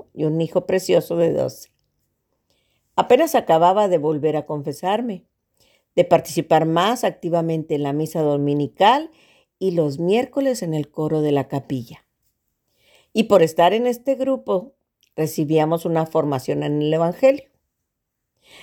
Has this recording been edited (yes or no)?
no